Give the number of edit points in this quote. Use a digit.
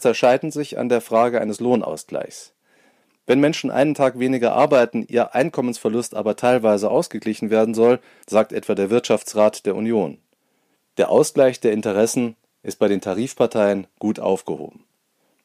2